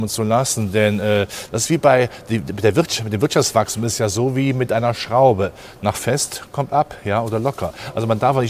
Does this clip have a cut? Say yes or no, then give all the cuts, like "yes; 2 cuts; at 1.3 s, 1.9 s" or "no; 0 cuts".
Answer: no; 0 cuts